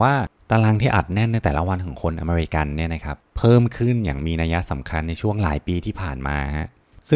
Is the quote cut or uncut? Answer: cut